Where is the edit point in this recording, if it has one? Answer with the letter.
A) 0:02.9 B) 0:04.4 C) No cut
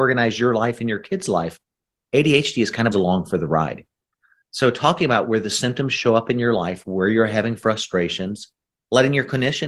A